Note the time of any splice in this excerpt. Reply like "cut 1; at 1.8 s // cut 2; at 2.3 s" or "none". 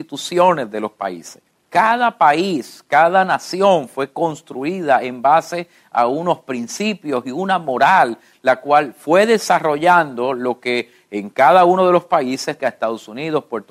cut 1; at 1.5 s // cut 2; at 12.6 s